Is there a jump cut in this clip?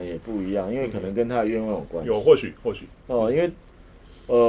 no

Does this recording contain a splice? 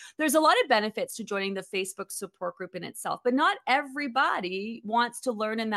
no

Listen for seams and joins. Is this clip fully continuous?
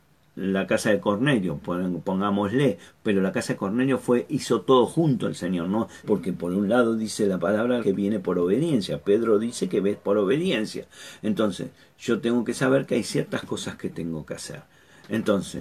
no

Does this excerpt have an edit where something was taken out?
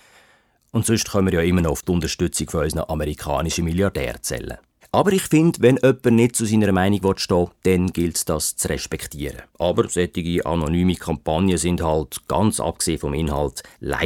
yes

